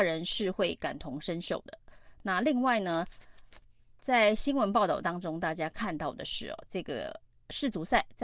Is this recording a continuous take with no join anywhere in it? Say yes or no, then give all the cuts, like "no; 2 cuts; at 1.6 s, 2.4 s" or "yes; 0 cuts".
yes; 0 cuts